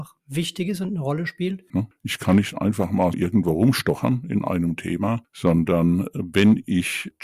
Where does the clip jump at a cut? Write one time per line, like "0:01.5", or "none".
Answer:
0:01.7
0:03.1

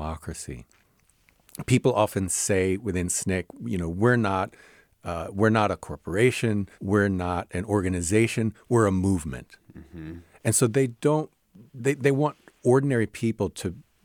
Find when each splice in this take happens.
0:06.7

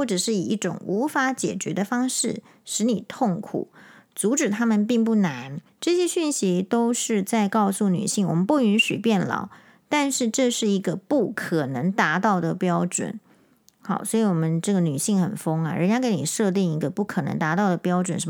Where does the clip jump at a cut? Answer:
0:05.7

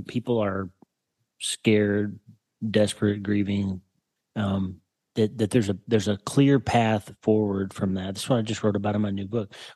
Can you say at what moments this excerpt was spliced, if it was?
0:04.2

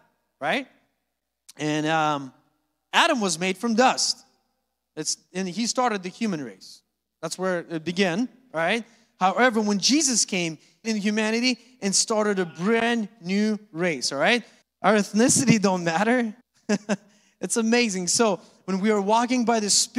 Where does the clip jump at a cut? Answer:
0:10.8
0:14.6
0:16.4

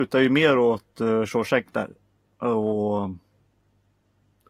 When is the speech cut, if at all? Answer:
none

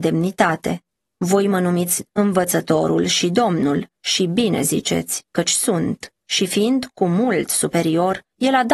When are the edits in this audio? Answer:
0:06.2

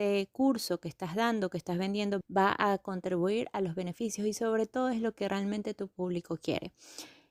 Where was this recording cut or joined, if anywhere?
0:02.2

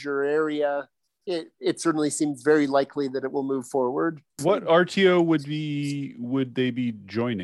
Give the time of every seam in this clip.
none

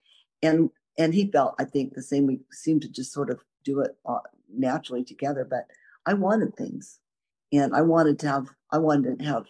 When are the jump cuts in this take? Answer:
none

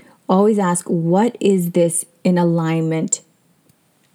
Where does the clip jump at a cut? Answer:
none

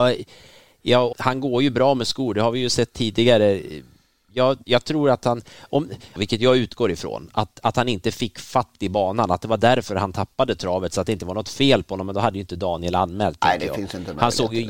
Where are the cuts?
0:01.1
0:06.2

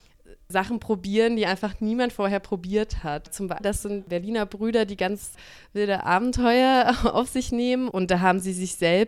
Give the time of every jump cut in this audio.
0:03.6
0:07.9

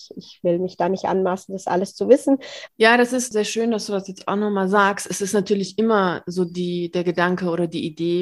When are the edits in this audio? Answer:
0:02.7

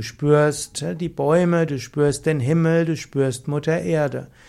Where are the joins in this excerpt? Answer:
0:01.7

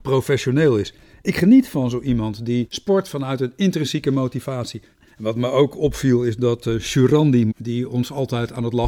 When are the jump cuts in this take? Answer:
0:05.1
0:07.5

